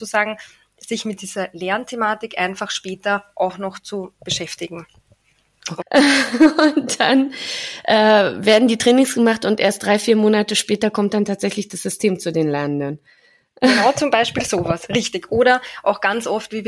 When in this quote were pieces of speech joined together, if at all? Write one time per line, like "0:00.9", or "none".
0:05.8